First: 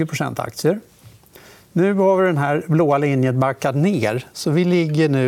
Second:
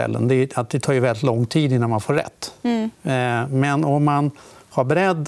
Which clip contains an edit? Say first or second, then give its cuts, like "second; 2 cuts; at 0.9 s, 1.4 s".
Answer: second; 1 cut; at 2.9 s